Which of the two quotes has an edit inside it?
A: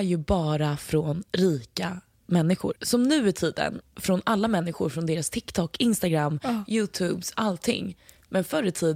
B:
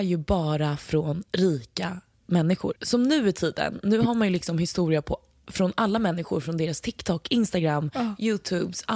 A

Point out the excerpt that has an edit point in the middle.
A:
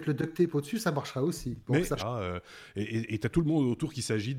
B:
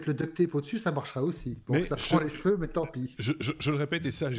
A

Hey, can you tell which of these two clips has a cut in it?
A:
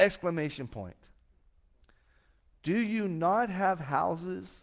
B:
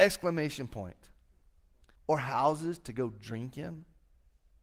B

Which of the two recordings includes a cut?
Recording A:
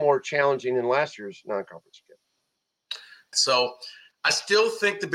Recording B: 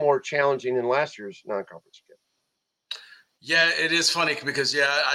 A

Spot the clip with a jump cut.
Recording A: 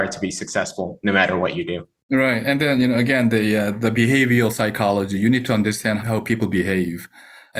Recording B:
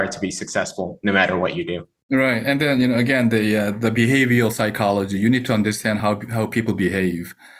A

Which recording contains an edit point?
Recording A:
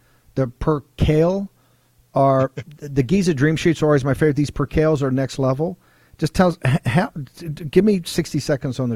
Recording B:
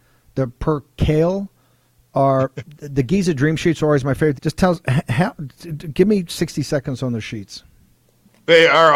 B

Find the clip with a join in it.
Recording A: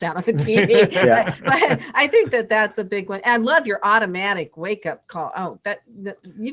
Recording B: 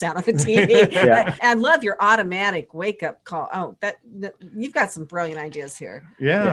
B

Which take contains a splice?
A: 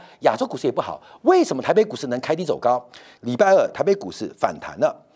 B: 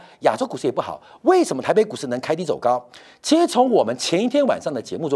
A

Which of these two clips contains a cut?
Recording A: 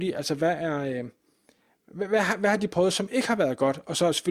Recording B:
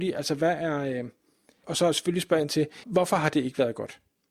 B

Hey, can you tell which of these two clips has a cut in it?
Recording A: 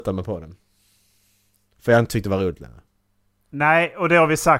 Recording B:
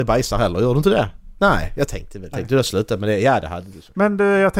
B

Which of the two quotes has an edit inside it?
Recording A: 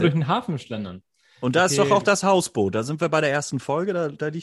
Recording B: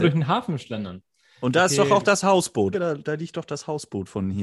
B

